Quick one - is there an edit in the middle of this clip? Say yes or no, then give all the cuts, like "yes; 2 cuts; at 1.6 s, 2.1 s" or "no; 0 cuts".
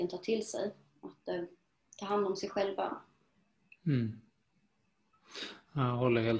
no; 0 cuts